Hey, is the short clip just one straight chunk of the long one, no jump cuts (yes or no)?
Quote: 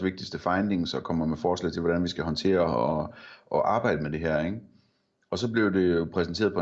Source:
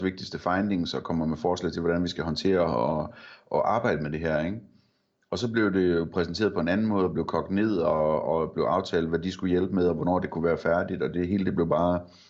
yes